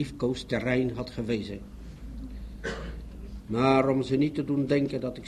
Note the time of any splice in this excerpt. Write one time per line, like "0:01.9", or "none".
0:03.4